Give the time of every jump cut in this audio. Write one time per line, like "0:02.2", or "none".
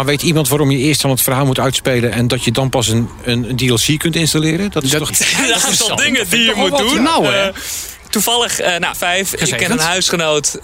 0:05.1
0:08.9